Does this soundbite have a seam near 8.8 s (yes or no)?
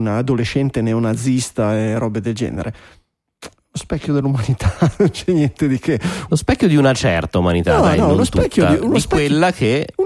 no